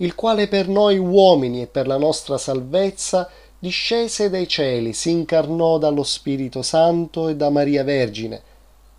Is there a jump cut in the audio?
no; 0 cuts

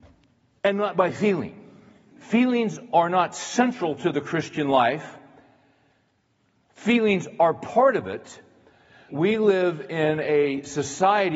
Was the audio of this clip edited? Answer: yes; 2 cuts; at 2.1 s, 9.1 s

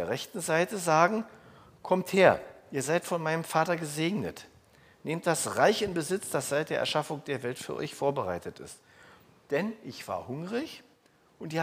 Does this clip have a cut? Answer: no; 0 cuts

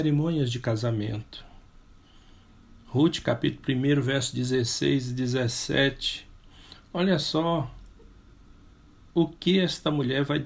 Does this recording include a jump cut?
no; 0 cuts

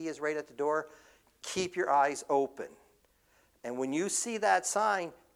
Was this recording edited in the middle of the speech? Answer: no; 0 cuts

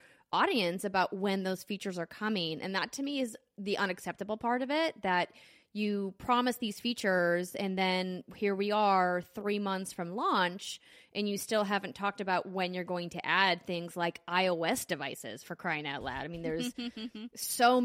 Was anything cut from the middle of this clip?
no; 0 cuts

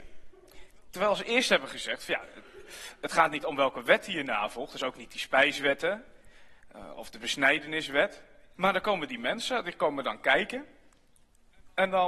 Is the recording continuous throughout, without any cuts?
no; 1 cut; at 8.5 s

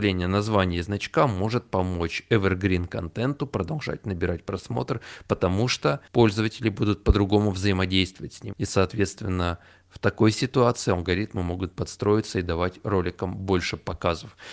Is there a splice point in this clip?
yes; 2 cuts; at 6.1 s, 8.5 s

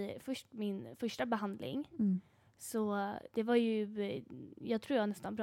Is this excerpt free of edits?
yes; 0 cuts

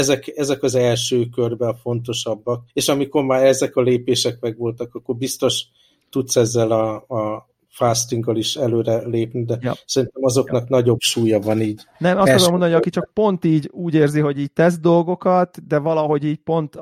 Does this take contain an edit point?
yes; 1 cut; at 2.7 s

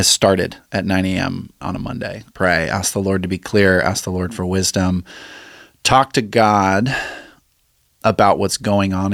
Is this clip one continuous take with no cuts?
no; 1 cut; at 2.3 s

